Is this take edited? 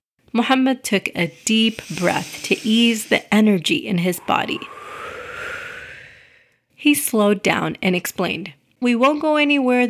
yes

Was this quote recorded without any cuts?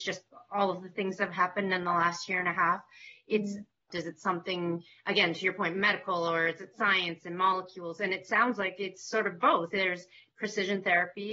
no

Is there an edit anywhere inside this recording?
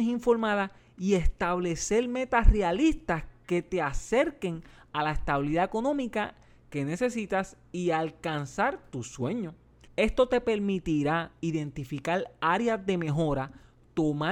yes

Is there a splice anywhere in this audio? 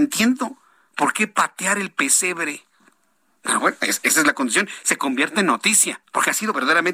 yes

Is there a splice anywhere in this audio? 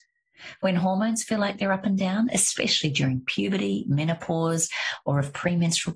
no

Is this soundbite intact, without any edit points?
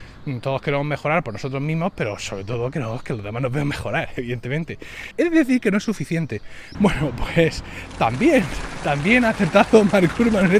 no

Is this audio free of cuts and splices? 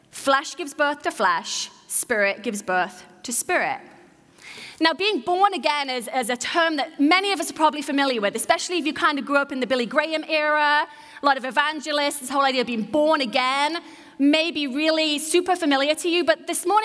yes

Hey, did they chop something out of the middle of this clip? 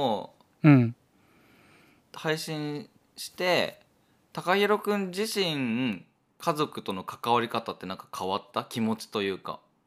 no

